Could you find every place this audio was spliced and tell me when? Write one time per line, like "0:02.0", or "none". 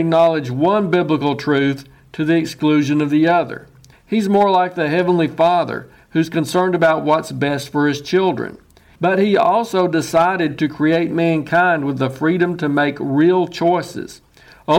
0:03.9
0:08.9